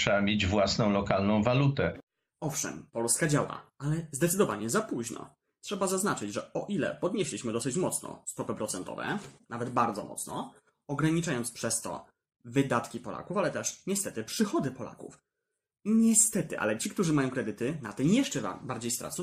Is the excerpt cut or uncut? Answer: uncut